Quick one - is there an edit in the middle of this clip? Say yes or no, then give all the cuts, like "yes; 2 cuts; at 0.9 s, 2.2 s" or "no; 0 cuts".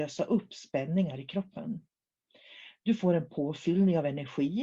no; 0 cuts